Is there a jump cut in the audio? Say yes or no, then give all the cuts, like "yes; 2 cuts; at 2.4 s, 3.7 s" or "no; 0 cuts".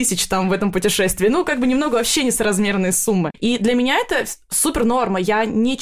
no; 0 cuts